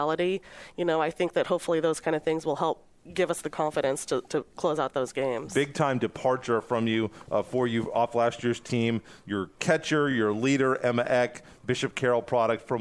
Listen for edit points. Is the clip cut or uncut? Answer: uncut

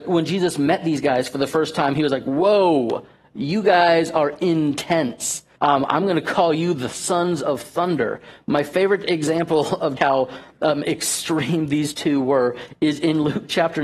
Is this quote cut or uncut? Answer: cut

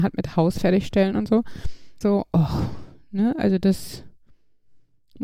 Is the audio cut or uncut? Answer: cut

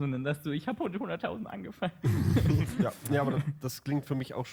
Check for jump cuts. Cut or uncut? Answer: cut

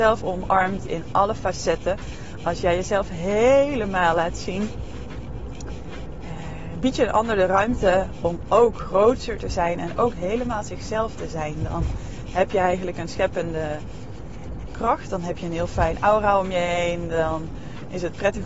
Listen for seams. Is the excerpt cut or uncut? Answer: uncut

